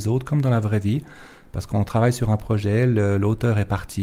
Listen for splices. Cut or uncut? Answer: uncut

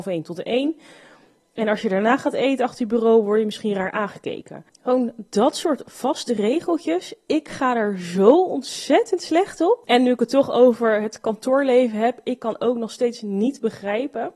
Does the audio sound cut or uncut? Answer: uncut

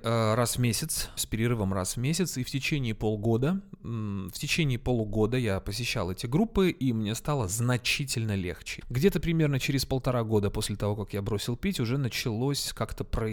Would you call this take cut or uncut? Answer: cut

